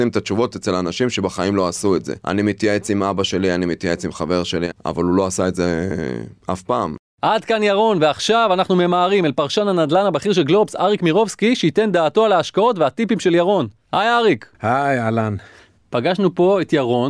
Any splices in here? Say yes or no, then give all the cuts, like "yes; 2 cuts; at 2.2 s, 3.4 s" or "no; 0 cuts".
no; 0 cuts